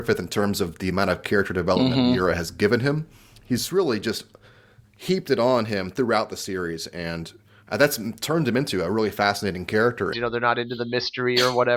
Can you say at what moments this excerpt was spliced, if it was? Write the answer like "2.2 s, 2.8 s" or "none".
10.1 s